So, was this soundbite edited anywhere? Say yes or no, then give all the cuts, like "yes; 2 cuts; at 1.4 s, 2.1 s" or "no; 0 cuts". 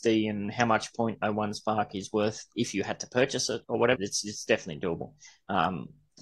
yes; 1 cut; at 4.0 s